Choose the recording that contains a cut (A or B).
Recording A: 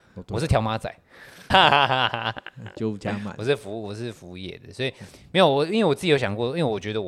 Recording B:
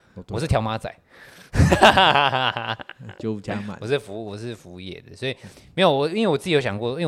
A